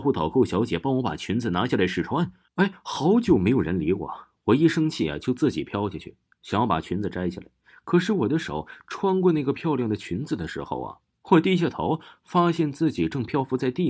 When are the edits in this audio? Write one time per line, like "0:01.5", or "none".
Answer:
none